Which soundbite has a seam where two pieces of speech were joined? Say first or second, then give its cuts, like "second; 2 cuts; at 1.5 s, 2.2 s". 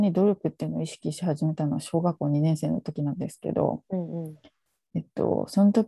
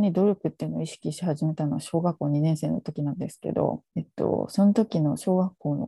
second; 1 cut; at 3.8 s